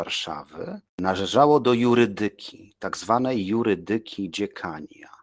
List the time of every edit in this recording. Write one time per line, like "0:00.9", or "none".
none